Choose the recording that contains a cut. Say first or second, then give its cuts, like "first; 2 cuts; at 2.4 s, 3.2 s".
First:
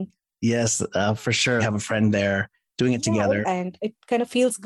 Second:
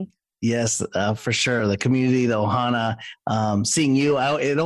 first; 2 cuts; at 1.6 s, 3.4 s